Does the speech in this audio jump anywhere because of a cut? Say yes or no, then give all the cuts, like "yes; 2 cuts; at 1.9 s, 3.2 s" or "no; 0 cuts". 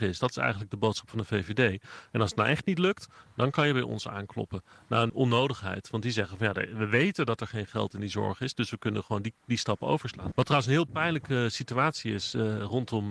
yes; 2 cuts; at 5.1 s, 10.3 s